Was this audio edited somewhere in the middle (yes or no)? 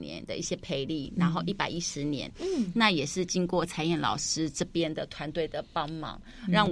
yes